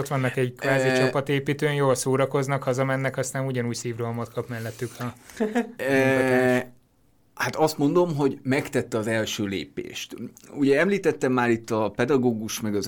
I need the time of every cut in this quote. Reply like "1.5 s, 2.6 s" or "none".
none